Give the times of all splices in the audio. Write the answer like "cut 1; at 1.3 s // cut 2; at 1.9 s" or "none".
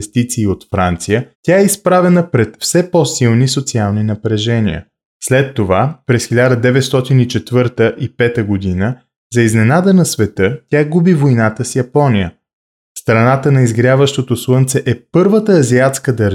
cut 1; at 1.3 s // cut 2; at 5.1 s